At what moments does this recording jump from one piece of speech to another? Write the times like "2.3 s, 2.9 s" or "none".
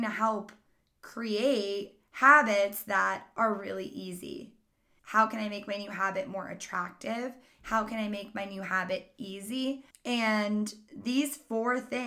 5.0 s, 9.9 s

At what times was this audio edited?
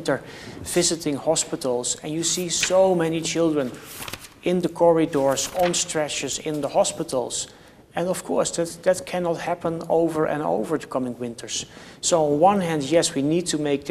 none

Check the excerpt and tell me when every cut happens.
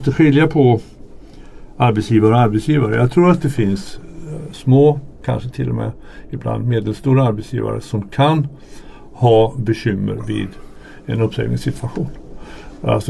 none

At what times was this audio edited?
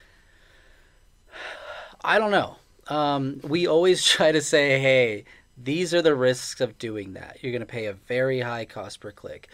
none

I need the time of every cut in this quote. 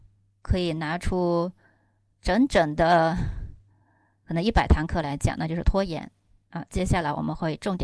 none

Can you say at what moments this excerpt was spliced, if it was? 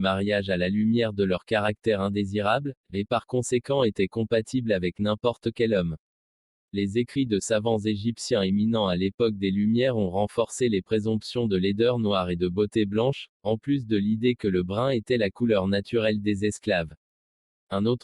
none

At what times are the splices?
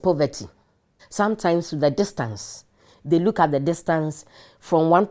1.0 s

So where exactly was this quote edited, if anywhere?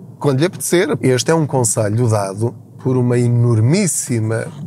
1.0 s

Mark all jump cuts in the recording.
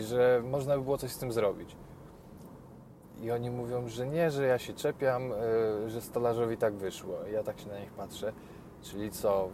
none

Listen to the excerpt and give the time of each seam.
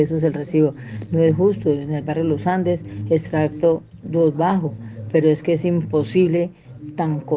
none

